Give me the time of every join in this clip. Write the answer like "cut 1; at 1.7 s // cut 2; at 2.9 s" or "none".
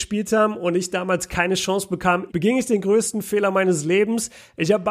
cut 1; at 2.3 s